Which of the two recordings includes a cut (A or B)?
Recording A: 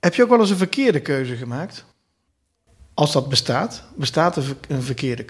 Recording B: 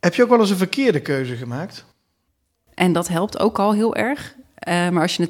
B